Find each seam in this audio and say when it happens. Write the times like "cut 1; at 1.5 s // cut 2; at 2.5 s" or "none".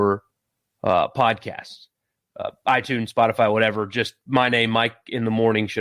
none